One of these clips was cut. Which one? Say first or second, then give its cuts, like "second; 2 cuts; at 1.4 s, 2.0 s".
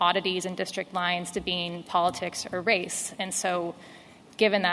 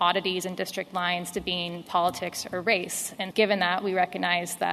second; 1 cut; at 3.3 s